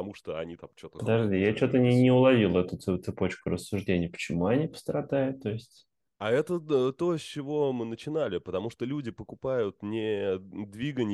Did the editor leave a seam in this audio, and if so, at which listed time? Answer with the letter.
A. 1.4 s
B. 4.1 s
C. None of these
C